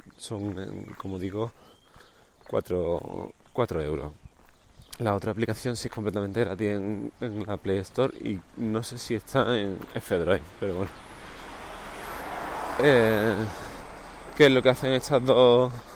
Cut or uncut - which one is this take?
uncut